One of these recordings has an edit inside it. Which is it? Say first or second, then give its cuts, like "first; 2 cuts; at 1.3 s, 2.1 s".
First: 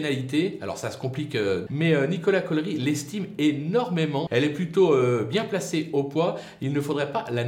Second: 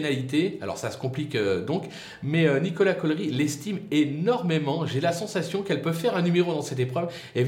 first; 2 cuts; at 1.7 s, 4.3 s